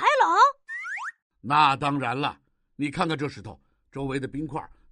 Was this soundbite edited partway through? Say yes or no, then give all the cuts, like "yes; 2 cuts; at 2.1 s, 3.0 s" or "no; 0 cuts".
no; 0 cuts